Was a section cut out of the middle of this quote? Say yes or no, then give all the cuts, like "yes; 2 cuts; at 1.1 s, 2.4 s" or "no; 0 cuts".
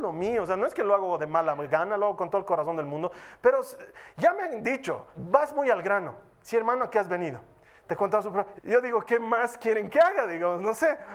yes; 2 cuts; at 5.1 s, 8.6 s